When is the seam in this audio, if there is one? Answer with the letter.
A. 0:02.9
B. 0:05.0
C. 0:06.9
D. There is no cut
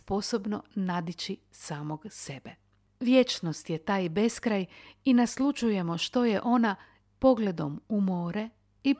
D